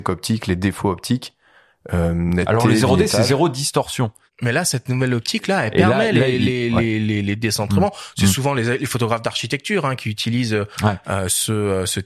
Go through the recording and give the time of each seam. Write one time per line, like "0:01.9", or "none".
none

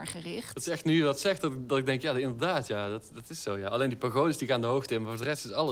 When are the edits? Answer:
none

